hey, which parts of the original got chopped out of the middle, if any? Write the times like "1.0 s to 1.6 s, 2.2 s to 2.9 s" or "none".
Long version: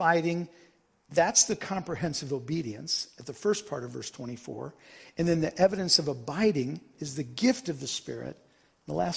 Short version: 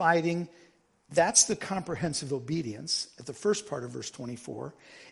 none